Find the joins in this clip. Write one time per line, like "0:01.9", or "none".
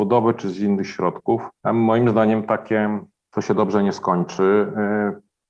0:01.6

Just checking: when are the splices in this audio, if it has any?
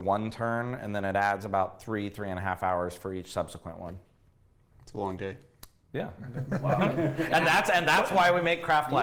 none

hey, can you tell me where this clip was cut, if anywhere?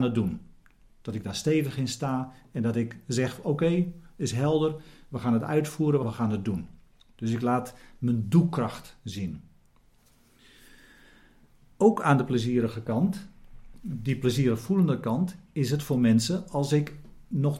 0:06.0

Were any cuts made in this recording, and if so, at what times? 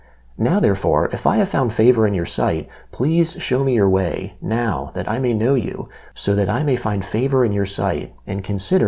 none

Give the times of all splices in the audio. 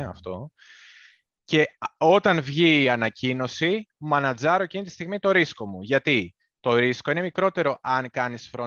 none

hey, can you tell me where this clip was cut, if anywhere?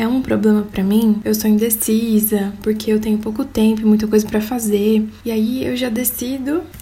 0:01.2

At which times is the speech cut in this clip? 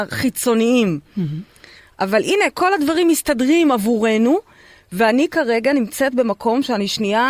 none

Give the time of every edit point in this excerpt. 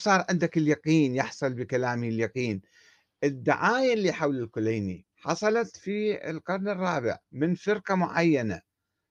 0:05.1
0:07.2

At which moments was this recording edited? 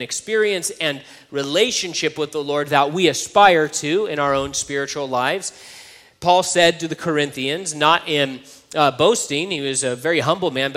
none

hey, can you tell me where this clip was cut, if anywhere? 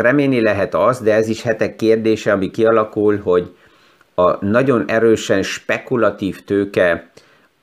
none

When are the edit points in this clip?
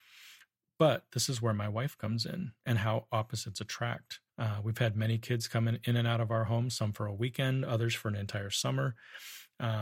0:04.3

